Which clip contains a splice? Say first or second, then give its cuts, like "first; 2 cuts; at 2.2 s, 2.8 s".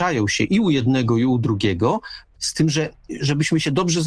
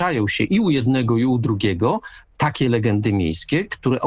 first; 1 cut; at 2.4 s